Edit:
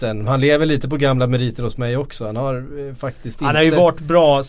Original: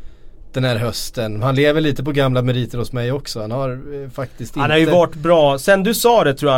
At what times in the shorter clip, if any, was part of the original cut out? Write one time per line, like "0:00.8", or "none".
none